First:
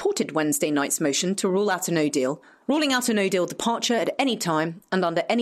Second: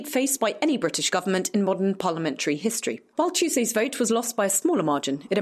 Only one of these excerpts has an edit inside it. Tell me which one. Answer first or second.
first